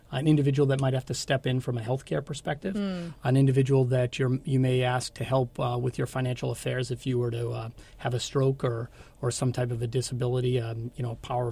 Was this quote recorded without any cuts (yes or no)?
yes